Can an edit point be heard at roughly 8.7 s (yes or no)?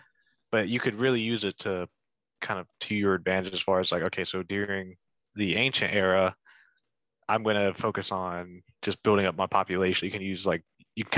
no